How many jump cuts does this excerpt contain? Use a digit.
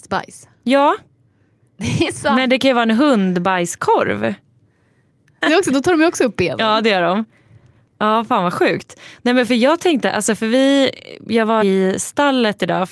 2